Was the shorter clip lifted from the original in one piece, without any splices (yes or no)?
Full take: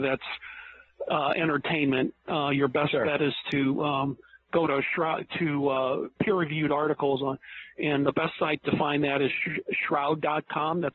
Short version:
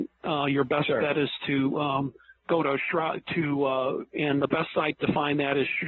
no